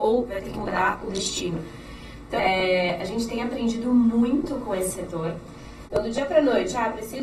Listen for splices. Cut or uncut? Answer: cut